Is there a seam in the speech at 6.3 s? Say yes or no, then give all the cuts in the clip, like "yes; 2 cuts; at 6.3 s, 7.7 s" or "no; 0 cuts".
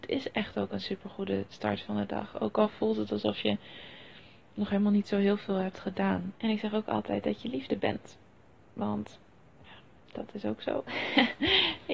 yes; 1 cut; at 6.3 s